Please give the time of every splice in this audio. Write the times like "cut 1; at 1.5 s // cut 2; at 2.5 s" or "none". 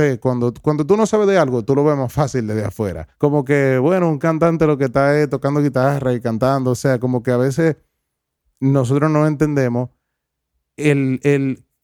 cut 1; at 3.1 s